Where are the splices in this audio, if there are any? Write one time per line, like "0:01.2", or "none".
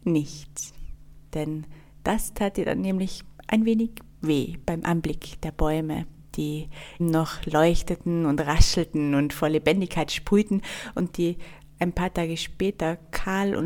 0:01.3
0:07.0